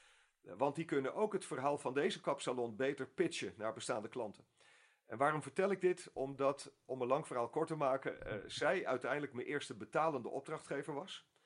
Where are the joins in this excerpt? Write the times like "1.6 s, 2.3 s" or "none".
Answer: none